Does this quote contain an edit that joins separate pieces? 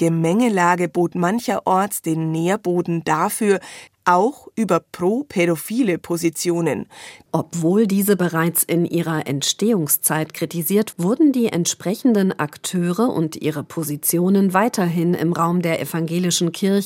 yes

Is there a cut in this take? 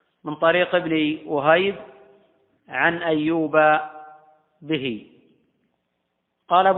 no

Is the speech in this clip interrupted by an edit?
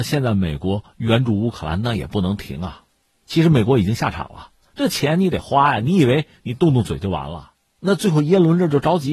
no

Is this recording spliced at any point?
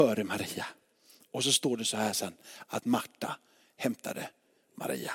no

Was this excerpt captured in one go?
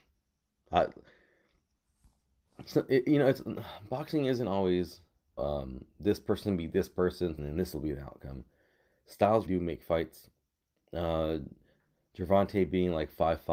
no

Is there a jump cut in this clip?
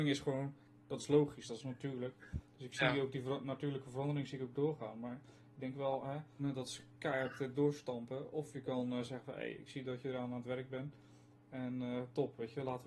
yes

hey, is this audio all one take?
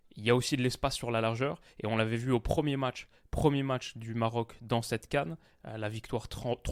yes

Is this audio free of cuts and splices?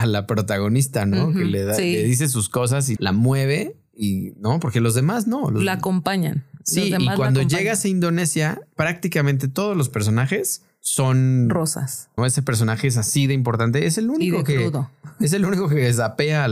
no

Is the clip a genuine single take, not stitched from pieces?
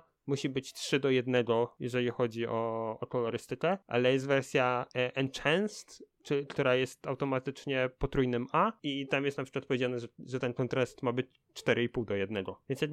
yes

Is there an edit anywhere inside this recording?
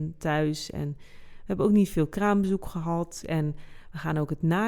yes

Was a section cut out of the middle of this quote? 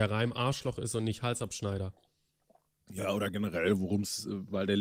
no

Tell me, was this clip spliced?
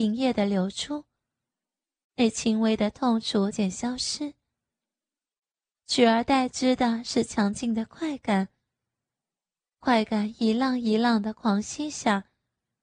yes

